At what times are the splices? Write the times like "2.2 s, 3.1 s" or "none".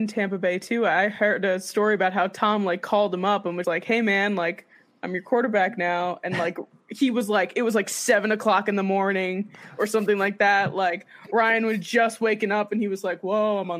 3.6 s